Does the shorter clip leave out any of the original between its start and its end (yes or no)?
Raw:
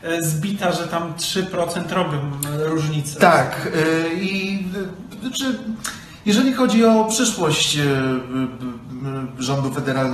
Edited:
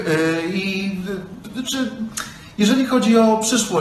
no